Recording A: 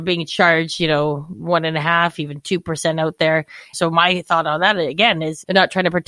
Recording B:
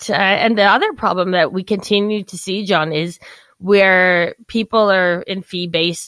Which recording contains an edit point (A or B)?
A